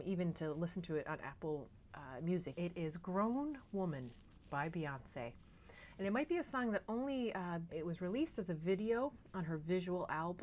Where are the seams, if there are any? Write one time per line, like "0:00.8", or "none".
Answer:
0:02.6
0:07.7